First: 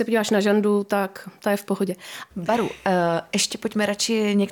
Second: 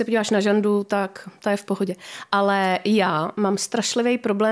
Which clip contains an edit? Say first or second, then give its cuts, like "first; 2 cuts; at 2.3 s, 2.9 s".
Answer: first; 1 cut; at 2.3 s